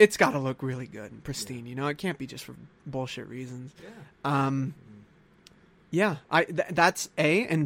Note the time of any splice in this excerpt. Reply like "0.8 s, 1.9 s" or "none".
none